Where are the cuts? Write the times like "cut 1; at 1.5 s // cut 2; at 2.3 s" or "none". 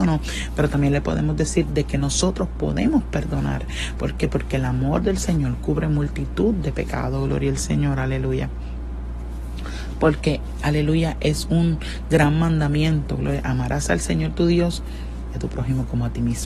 none